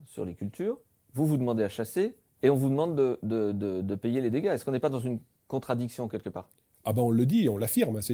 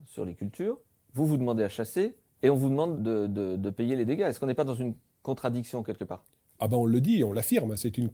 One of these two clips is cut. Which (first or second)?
second